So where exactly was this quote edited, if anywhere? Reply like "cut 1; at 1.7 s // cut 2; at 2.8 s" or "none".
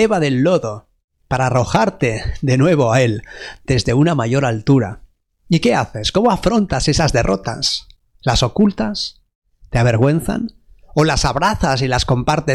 none